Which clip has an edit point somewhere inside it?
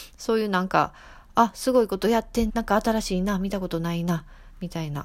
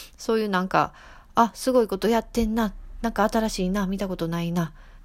first; 1 cut; at 2.5 s

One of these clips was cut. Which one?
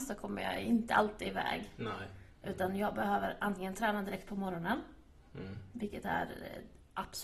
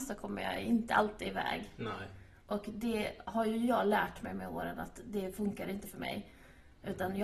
first; 1 cut; at 2.3 s

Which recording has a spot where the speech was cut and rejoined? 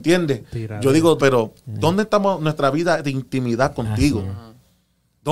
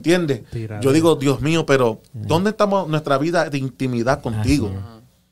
first; 1 cut; at 1.2 s

